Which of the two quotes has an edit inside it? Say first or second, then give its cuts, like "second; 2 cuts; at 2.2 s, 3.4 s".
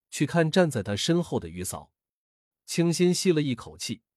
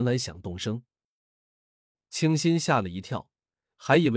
first; 1 cut; at 2.5 s